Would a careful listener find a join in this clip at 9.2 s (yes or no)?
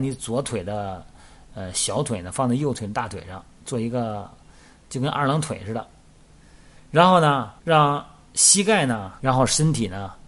yes